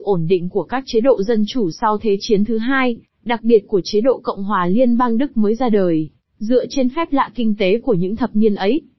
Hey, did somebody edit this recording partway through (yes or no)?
no